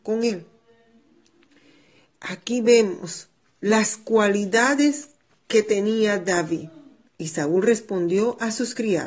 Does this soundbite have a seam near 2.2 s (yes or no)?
no